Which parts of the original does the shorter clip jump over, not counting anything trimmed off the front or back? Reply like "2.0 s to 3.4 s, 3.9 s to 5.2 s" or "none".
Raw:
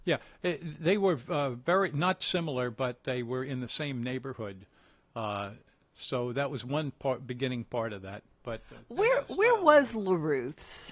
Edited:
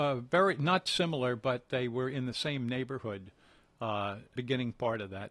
5.7 s to 7.3 s